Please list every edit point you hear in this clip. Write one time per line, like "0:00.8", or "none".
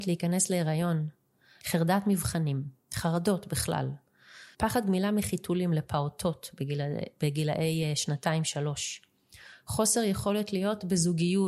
0:01.6
0:04.5